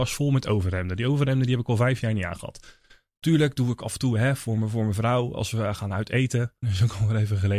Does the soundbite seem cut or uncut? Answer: cut